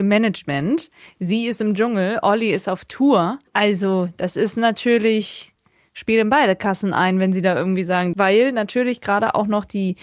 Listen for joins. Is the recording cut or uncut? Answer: cut